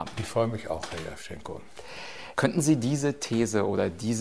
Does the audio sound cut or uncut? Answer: cut